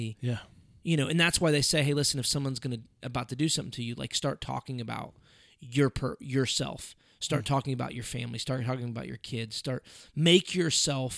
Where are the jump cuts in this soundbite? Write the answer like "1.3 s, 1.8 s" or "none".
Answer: none